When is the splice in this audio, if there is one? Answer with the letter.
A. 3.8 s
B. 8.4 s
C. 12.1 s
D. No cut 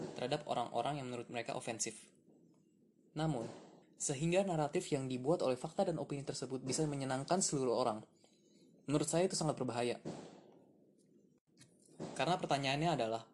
A